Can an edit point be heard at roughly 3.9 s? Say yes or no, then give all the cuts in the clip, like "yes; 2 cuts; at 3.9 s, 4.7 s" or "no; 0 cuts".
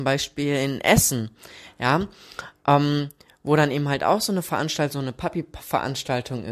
no; 0 cuts